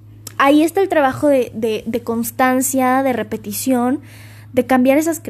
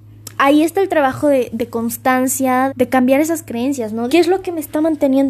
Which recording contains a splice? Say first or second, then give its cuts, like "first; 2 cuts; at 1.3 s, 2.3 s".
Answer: second; 3 cuts; at 1.5 s, 2.7 s, 4.1 s